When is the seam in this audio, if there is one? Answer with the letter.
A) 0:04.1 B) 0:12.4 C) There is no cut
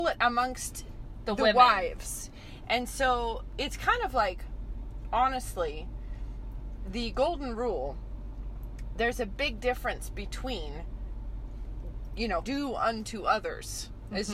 B